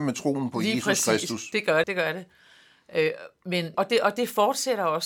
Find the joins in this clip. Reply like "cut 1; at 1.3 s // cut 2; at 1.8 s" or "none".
cut 1; at 1.8 s // cut 2; at 3.7 s